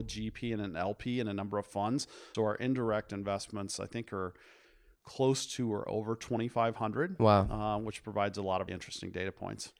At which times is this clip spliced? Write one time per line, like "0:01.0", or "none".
0:02.3
0:08.7